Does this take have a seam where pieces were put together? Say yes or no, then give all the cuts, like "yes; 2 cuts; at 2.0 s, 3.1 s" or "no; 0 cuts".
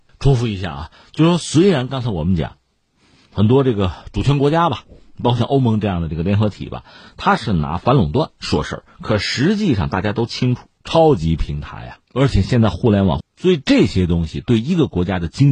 yes; 3 cuts; at 10.8 s, 12.0 s, 13.2 s